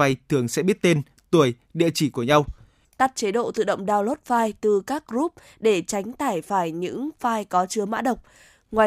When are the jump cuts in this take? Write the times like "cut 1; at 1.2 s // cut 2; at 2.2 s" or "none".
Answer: cut 1; at 2.8 s